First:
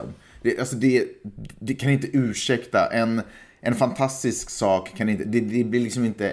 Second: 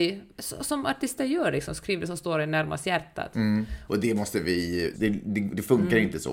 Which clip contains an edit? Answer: second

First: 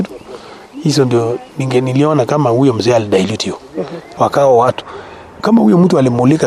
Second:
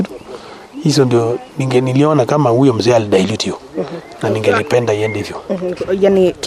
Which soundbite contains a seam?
first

